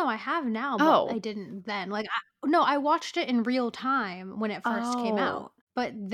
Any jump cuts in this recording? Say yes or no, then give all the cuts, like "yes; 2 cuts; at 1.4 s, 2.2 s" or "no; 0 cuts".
no; 0 cuts